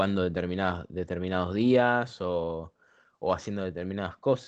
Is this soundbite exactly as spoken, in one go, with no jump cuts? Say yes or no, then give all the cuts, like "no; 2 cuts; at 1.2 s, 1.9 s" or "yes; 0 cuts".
yes; 0 cuts